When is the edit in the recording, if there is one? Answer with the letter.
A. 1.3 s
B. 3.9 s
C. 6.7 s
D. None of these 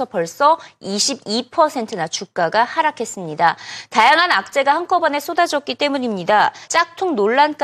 C